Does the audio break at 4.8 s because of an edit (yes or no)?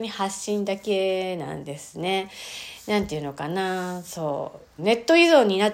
yes